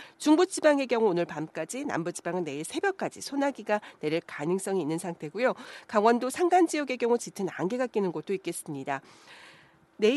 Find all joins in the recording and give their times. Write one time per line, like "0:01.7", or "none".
none